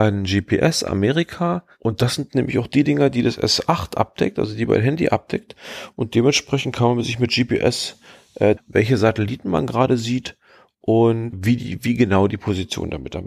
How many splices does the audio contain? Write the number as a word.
two